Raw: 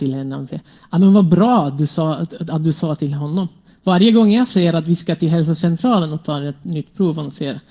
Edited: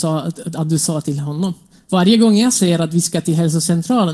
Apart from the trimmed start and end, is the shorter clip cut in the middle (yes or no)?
no